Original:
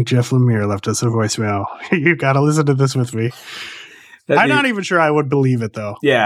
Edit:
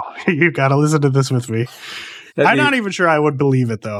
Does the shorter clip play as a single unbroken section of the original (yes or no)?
no